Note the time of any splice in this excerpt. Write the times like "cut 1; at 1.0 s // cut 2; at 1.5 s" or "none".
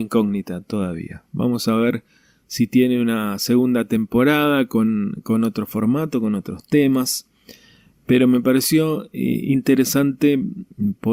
none